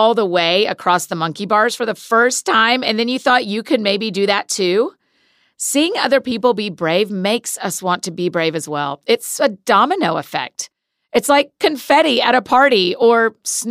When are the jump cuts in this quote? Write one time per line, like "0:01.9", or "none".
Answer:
none